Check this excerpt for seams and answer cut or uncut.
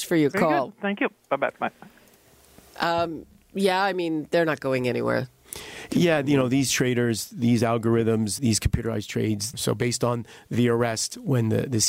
cut